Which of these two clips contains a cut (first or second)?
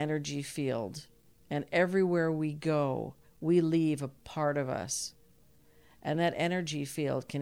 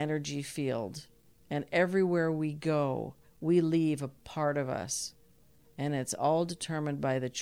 second